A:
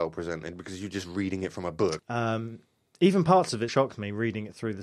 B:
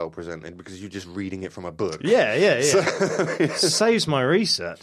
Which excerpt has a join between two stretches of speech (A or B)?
A